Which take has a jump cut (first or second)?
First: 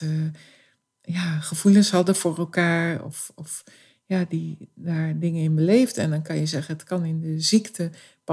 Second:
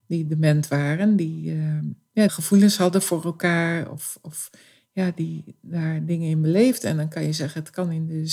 second